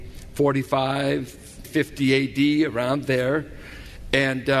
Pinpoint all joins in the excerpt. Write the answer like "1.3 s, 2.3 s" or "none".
1.6 s